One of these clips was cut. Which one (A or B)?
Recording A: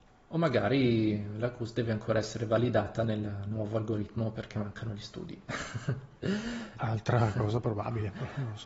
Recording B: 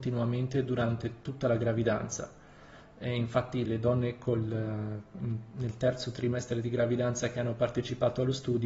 B